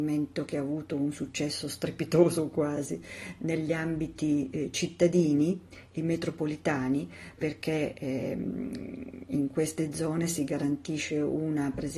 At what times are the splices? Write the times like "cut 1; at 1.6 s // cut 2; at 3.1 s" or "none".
cut 1; at 7.4 s